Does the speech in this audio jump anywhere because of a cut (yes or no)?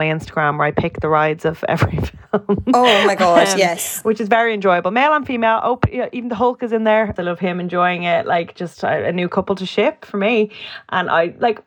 yes